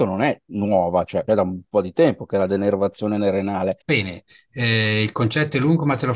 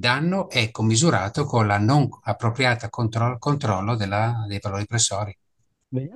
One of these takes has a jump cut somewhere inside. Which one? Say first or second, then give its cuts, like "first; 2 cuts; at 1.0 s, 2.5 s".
first; 2 cuts; at 1.3 s, 3.8 s